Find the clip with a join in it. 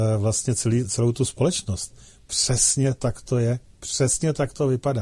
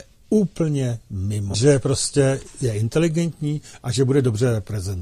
second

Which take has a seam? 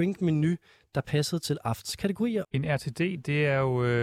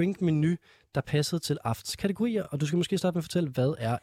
first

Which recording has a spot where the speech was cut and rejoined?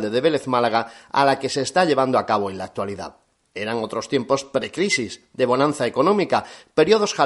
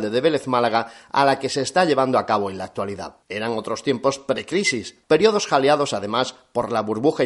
second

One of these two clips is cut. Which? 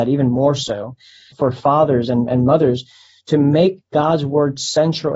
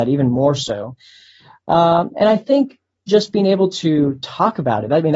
first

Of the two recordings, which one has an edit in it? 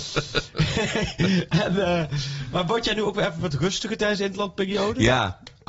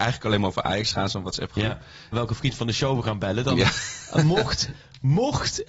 second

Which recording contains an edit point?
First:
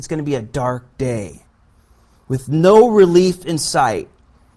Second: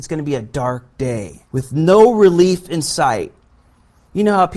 second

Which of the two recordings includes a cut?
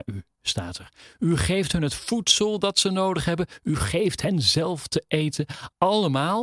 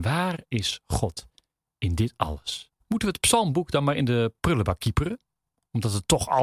second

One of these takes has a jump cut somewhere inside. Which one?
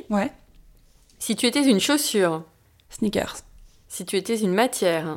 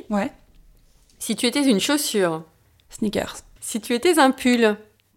second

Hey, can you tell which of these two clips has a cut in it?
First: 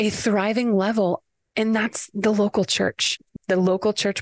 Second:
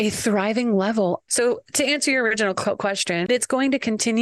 second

